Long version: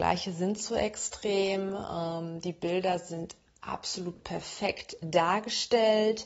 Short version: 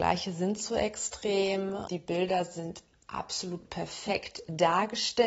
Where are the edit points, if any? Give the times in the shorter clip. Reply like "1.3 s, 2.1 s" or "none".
1.9 s